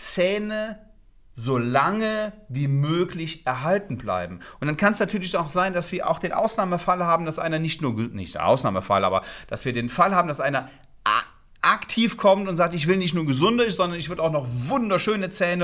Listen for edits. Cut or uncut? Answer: uncut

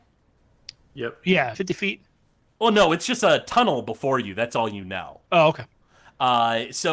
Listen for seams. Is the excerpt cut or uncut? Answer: cut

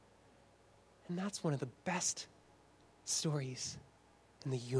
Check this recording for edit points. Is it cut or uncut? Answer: uncut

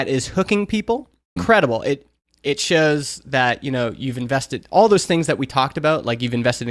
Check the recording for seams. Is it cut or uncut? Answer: cut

